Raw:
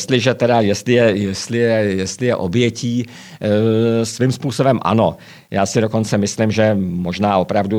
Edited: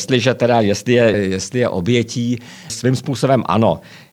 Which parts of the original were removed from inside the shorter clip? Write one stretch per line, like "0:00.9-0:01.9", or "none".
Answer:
0:01.1-0:01.8
0:03.4-0:04.1